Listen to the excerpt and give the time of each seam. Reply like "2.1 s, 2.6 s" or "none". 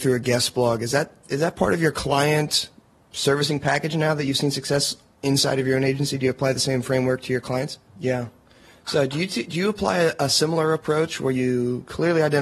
7.9 s